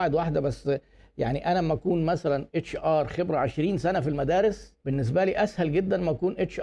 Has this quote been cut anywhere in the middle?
yes; 1 cut; at 4.8 s

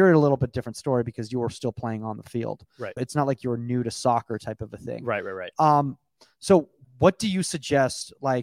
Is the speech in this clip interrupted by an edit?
yes; 2 cuts; at 3.0 s, 6.8 s

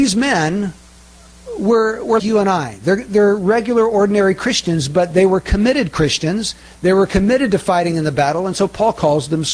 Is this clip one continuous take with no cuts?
no; 1 cut; at 2.2 s

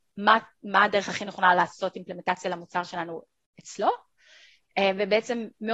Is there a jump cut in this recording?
no; 0 cuts

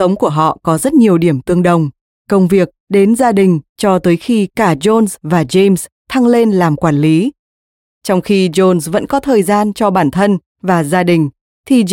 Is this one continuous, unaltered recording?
no; 2 cuts; at 2.1 s, 3.7 s

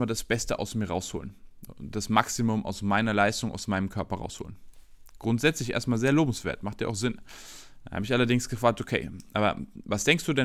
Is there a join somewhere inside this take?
no; 0 cuts

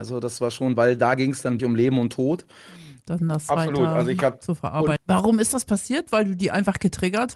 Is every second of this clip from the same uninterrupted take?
no; 3 cuts; at 1.6 s, 3.0 s, 5.0 s

